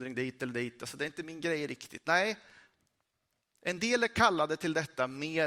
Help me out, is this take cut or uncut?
uncut